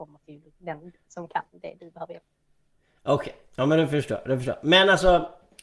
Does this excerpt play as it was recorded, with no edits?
yes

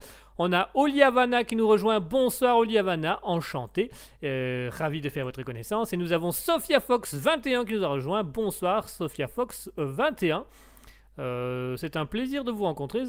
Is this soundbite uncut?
yes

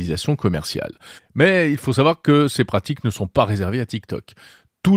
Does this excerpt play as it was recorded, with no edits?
no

